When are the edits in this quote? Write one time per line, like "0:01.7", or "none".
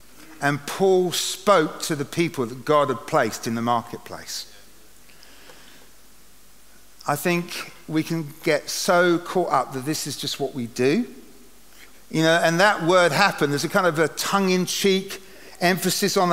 0:11.9